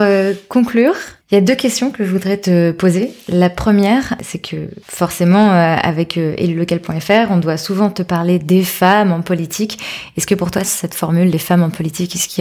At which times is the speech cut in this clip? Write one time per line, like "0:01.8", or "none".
0:10.6

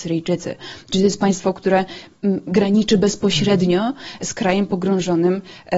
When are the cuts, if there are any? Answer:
none

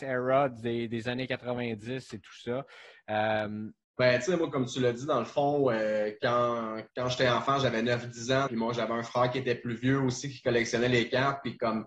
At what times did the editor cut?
0:03.8
0:06.9
0:08.5

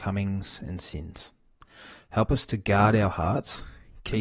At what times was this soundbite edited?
none

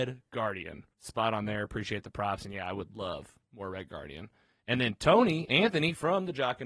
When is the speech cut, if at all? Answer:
0:00.9

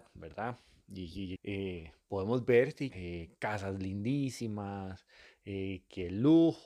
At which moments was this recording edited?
0:01.4
0:02.9

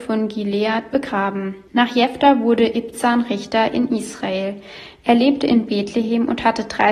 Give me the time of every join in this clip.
0:01.7

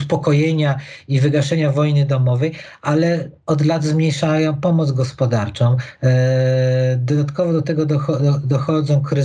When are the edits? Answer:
0:06.0

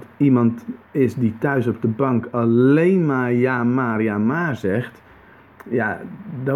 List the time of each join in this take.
none

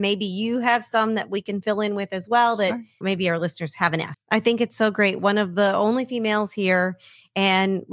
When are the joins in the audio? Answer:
0:03.0
0:04.1

